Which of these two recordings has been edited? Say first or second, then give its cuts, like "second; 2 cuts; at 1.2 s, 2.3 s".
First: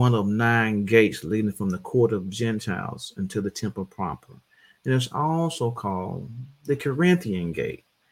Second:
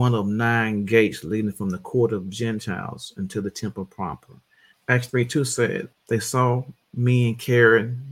second; 2 cuts; at 4.7 s, 5.9 s